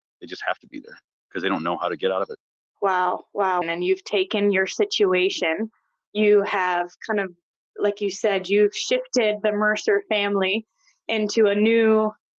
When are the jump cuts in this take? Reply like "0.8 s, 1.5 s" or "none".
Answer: 3.6 s